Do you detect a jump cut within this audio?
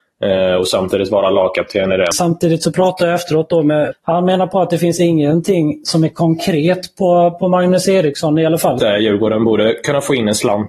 yes; 3 cuts; at 2.1 s, 3.9 s, 8.8 s

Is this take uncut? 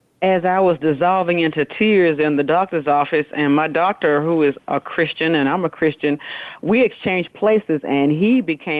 yes; 0 cuts

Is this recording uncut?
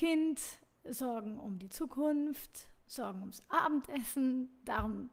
yes; 0 cuts

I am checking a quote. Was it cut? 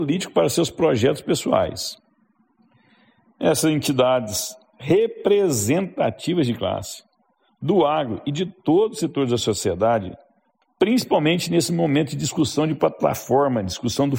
yes; 1 cut; at 10.6 s

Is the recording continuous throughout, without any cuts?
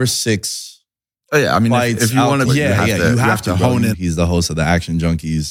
no; 2 cuts; at 2.4 s, 3.9 s

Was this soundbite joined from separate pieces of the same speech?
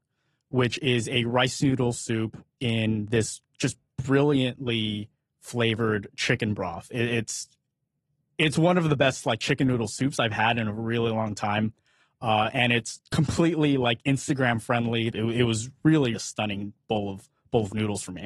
yes; 2 cuts; at 15.1 s, 16.1 s

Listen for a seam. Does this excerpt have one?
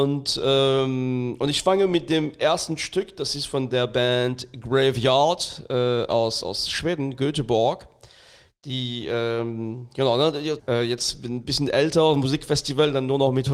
yes; 1 cut; at 10.6 s

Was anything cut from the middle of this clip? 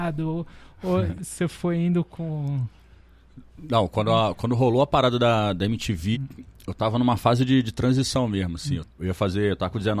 yes; 2 cuts; at 6.1 s, 8.8 s

